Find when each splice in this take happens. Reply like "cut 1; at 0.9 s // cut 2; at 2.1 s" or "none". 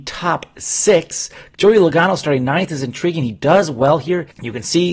cut 1; at 1.5 s